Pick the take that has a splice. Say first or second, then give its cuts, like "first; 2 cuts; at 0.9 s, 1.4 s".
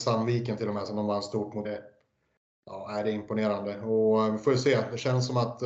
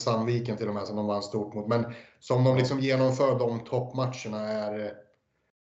first; 1 cut; at 1.6 s